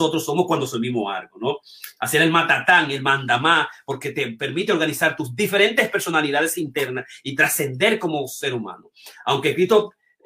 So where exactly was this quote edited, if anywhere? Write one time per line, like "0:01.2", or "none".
0:02.0